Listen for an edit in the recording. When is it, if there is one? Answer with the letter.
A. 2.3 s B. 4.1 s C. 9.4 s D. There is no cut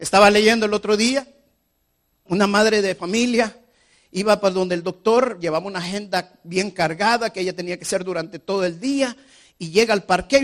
A